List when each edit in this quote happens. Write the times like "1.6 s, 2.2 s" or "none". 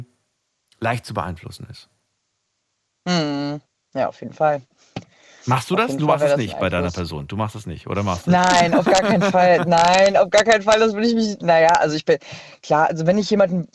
none